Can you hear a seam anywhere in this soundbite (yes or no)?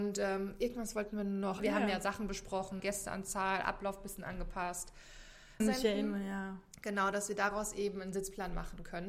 yes